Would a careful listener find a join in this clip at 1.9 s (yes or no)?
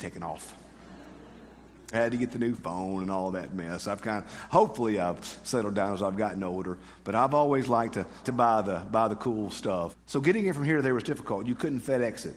yes